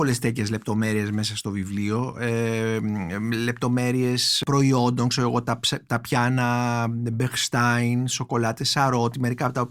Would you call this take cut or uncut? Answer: uncut